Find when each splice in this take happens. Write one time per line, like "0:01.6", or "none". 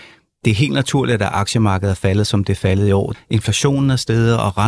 0:03.1